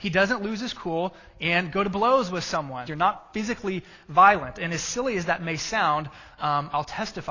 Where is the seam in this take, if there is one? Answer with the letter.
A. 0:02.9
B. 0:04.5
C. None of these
A